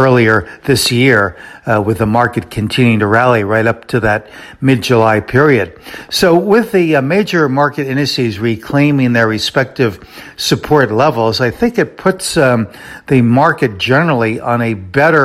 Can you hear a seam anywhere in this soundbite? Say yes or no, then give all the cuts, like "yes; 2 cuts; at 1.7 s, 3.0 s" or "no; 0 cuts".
no; 0 cuts